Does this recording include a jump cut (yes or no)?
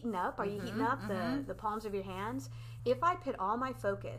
yes